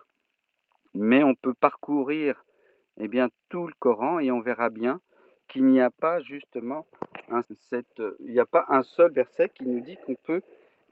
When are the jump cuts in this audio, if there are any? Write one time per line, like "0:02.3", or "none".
0:07.4